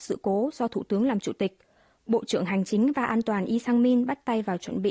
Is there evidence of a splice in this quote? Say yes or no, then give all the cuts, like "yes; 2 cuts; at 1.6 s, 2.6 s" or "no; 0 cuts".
no; 0 cuts